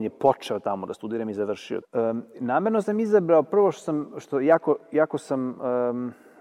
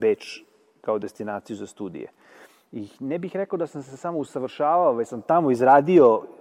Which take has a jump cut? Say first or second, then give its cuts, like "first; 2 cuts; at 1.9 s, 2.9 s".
first; 1 cut; at 1.8 s